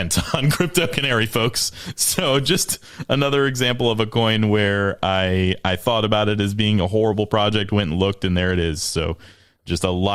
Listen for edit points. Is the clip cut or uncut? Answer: uncut